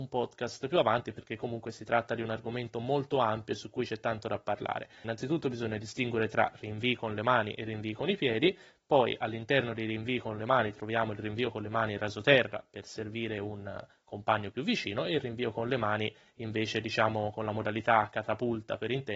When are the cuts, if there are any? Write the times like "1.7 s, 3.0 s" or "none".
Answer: 5.0 s